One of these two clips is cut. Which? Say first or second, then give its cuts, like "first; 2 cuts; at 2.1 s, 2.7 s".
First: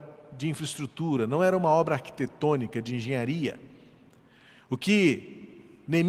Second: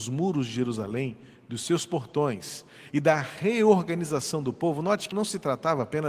second; 1 cut; at 5.1 s